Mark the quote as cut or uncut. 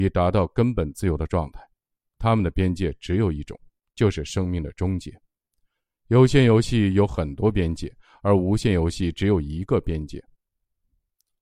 uncut